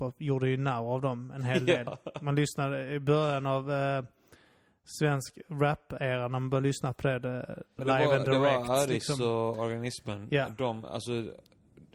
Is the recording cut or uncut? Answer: cut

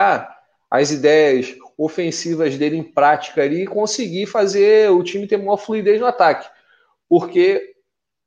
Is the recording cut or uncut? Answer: uncut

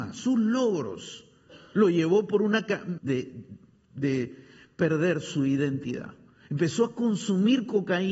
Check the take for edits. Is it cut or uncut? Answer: cut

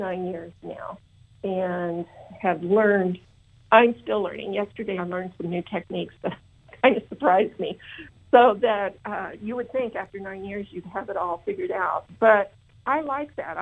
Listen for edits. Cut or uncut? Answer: uncut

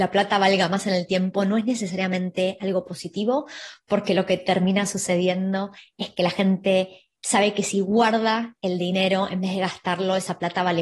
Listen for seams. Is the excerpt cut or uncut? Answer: uncut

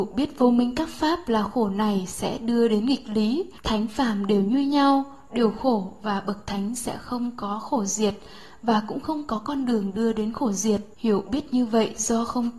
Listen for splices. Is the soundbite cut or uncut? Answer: cut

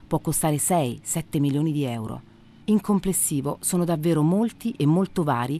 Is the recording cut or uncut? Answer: cut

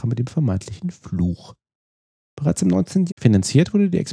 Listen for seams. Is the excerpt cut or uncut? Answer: cut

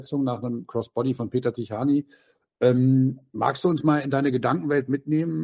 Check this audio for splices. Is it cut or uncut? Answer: uncut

